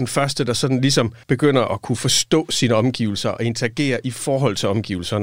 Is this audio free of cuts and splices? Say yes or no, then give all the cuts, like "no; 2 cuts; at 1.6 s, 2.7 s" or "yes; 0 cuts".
no; 1 cut; at 1.2 s